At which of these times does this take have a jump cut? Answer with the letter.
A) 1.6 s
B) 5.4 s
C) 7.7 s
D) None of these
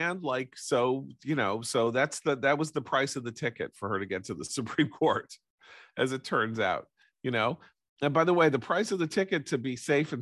D